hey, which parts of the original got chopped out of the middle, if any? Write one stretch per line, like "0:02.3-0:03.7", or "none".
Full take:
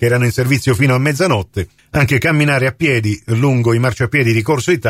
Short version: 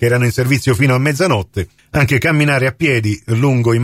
none